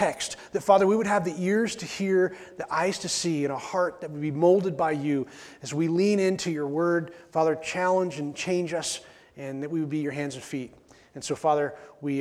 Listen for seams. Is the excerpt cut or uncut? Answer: uncut